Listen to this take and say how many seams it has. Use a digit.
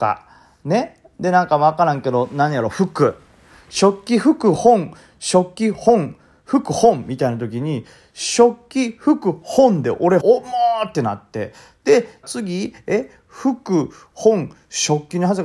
2